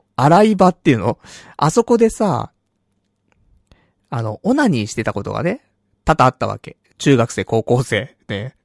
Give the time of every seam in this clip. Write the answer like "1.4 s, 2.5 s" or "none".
6.9 s

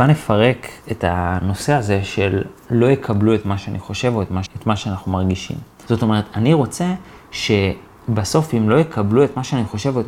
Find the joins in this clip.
4.5 s, 5.9 s

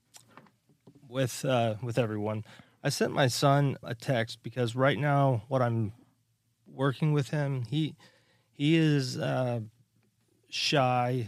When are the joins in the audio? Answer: 3.8 s

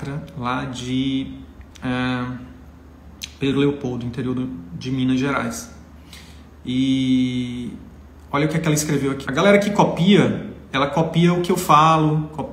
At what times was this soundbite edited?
9.2 s

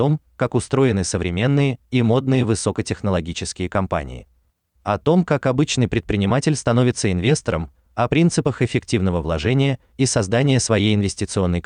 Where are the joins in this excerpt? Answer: 4.7 s

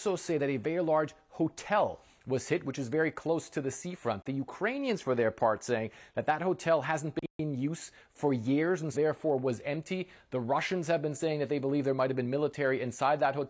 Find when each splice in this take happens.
8.9 s

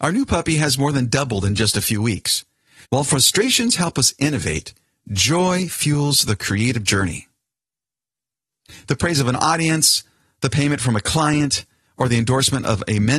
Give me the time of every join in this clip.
2.8 s

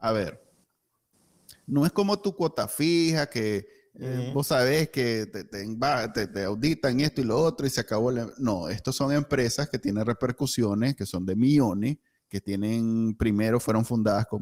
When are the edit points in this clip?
none

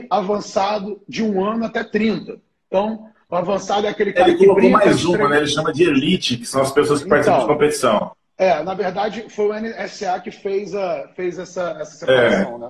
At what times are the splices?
none

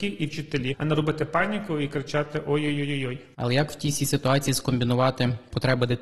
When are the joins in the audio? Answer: 3.3 s

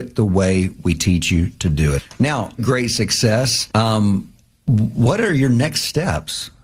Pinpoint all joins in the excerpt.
2.6 s, 3.7 s

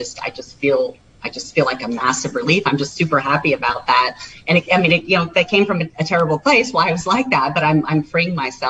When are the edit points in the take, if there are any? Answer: none

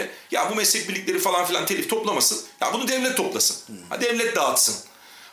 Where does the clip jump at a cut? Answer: 4.0 s

